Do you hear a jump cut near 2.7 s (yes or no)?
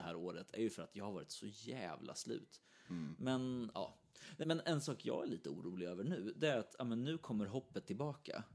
no